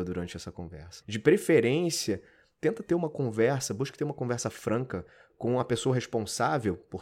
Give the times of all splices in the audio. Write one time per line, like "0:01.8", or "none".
0:01.0